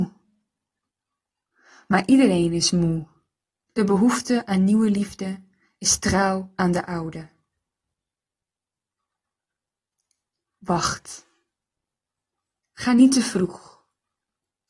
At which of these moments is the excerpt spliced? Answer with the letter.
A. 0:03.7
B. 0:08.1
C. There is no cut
A